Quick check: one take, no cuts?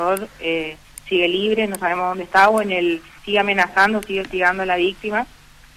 no; 1 cut; at 3.2 s

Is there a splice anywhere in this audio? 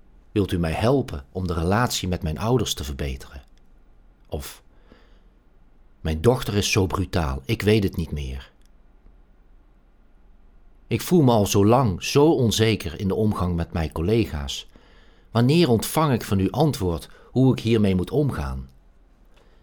no; 0 cuts

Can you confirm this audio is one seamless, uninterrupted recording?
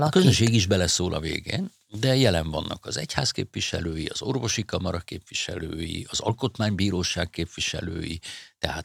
yes; 0 cuts

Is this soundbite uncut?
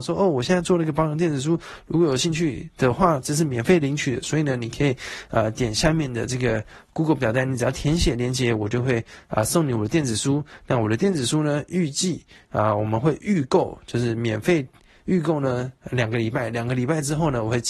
yes; 0 cuts

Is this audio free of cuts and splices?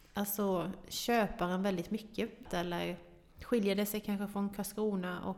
no; 1 cut; at 2.5 s

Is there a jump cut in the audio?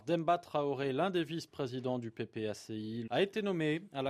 yes; 1 cut; at 3.1 s

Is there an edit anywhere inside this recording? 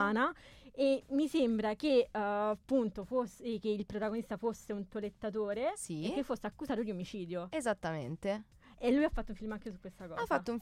no; 0 cuts

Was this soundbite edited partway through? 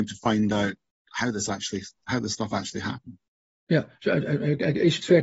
no; 0 cuts

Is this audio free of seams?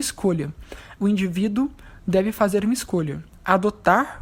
no; 1 cut; at 1.0 s

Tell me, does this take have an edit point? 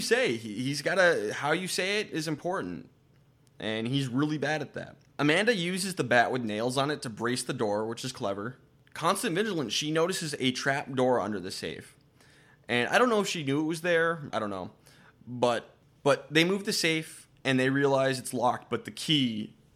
yes; 1 cut; at 14.3 s

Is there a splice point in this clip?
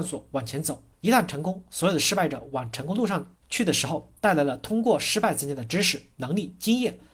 yes; 2 cuts; at 0.9 s, 3.4 s

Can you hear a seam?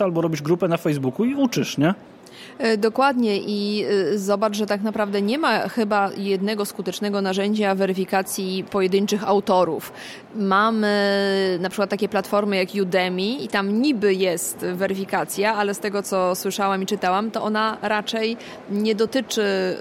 no; 0 cuts

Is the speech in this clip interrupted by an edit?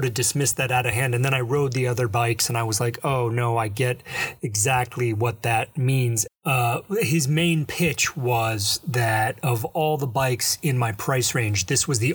yes; 1 cut; at 6.3 s

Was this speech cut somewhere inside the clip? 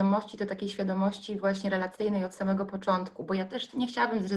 no; 0 cuts

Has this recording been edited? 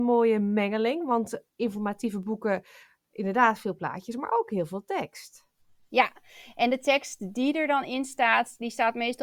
no; 0 cuts

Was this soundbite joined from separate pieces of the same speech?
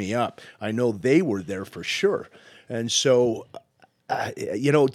no; 0 cuts

